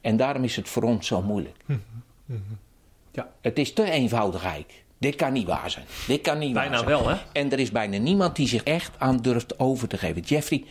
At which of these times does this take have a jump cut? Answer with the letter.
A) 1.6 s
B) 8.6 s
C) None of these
B